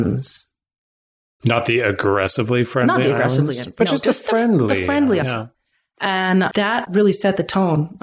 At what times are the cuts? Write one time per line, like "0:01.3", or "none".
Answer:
0:05.2
0:06.8